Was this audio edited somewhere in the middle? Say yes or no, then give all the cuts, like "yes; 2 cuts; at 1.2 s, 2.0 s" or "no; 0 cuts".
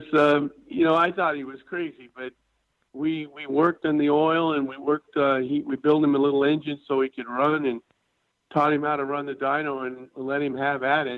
no; 0 cuts